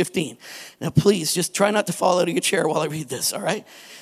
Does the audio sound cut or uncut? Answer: uncut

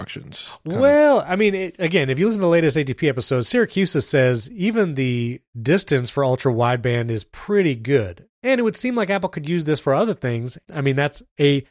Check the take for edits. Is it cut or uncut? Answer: cut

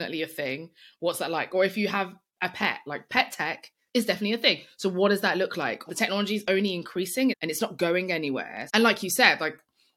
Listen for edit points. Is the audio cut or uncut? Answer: cut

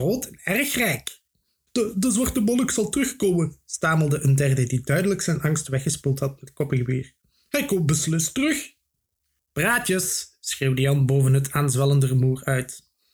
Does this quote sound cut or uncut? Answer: cut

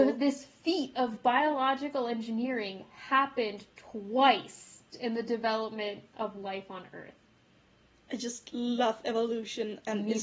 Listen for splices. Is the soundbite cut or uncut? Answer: cut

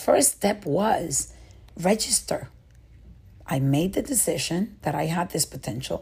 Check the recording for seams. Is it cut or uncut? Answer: cut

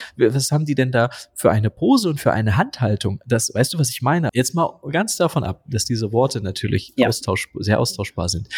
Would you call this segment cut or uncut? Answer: cut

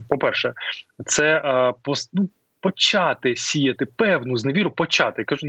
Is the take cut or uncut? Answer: uncut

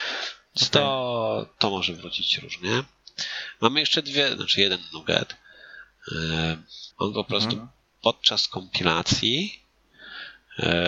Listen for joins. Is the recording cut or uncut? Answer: cut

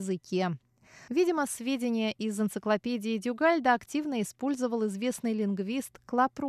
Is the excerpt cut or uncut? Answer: cut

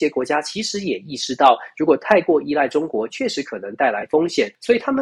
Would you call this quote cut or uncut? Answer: uncut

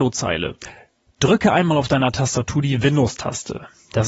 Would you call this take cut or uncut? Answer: uncut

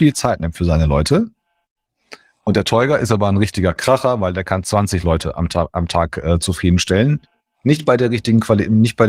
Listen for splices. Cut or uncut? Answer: uncut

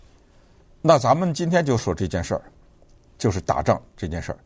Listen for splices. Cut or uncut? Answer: cut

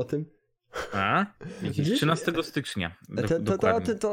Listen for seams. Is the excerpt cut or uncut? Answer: uncut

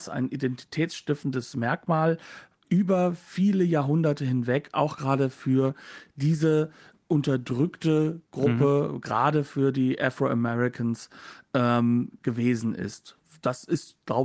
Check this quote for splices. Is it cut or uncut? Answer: uncut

